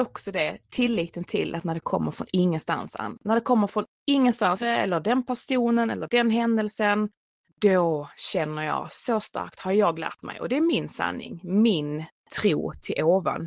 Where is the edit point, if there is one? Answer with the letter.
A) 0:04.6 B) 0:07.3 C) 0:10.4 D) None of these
A